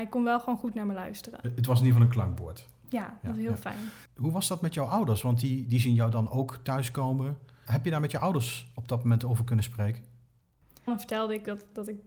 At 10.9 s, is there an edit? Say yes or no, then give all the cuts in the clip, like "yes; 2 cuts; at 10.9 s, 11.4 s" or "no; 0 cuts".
yes; 1 cut; at 10.9 s